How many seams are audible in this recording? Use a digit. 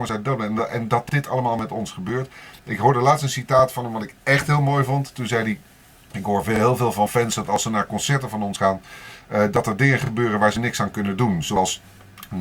0